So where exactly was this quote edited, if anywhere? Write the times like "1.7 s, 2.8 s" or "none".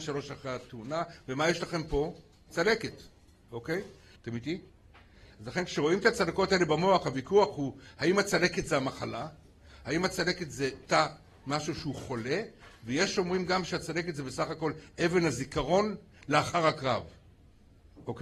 4.2 s

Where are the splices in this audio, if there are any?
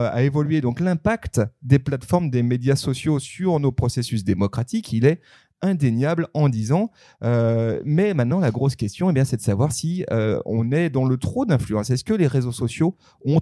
none

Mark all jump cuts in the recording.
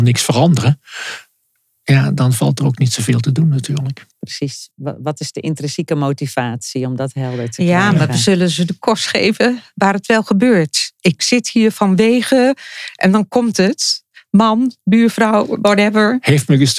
4.1 s

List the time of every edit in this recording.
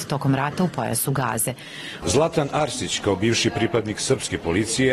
2.0 s

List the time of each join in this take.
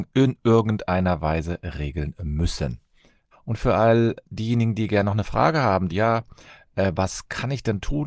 3.3 s, 5.9 s

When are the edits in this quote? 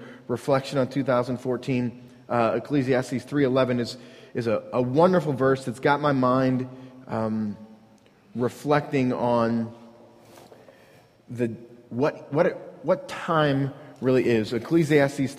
none

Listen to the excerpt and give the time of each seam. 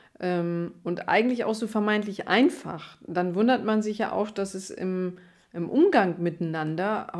none

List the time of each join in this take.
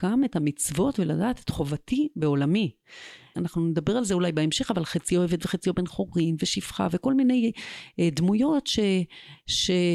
3.3 s

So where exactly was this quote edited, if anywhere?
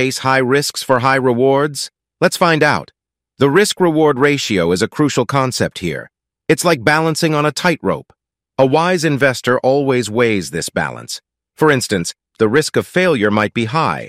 8.4 s, 12.3 s

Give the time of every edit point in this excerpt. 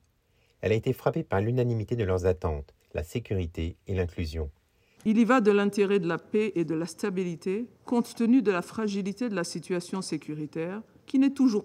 5.0 s

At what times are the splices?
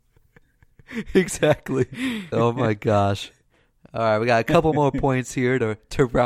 2.3 s

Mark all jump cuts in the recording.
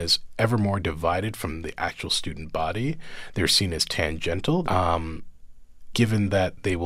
4.6 s, 5.9 s

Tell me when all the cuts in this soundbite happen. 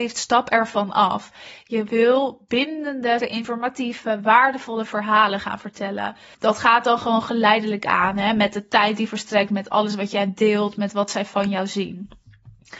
3.2 s, 6.3 s

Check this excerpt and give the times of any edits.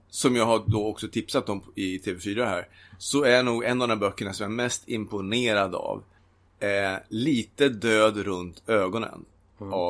none

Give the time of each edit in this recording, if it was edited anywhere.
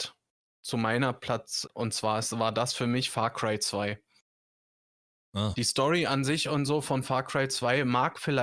1.6 s

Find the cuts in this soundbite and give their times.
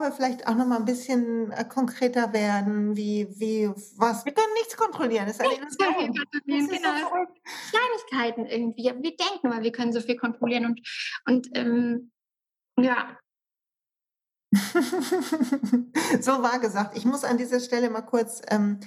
4.2 s

